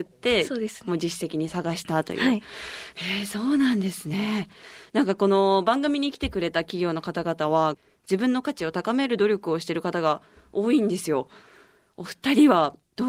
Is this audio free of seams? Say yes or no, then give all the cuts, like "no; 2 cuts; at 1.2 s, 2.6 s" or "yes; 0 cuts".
no; 1 cut; at 7.7 s